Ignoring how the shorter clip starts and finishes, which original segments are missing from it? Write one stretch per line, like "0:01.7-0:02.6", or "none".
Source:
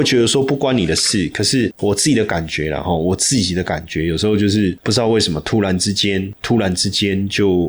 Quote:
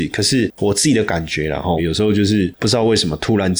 0:03.0-0:04.0